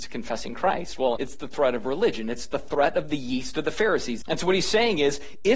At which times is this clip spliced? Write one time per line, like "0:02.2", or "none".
0:01.2
0:04.2